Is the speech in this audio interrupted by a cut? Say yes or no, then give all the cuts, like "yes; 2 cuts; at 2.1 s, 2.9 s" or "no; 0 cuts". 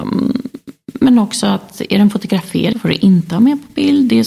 yes; 1 cut; at 2.7 s